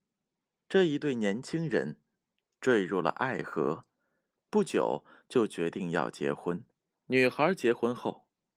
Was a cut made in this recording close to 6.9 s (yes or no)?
yes